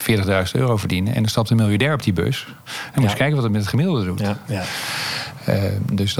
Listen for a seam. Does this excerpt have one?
yes; 1 cut; at 4.4 s

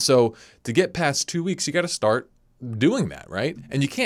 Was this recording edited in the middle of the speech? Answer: no; 0 cuts

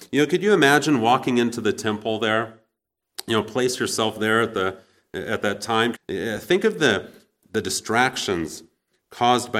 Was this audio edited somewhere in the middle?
yes; 1 cut; at 5.9 s

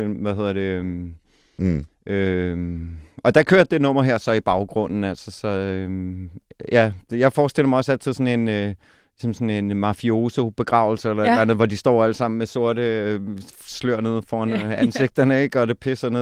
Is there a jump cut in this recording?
no; 0 cuts

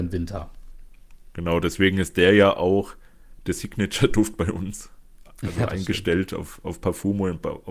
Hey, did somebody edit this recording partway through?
no; 0 cuts

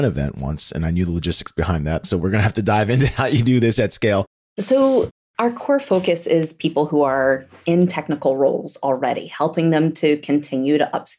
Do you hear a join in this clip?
yes; 2 cuts; at 2.0 s, 4.5 s

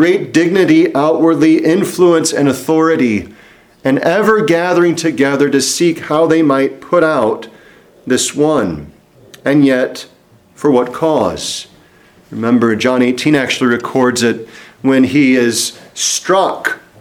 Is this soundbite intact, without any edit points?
yes; 0 cuts

